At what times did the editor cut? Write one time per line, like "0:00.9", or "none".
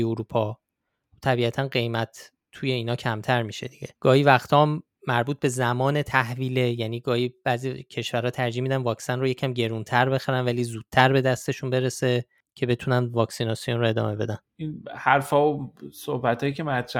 0:03.9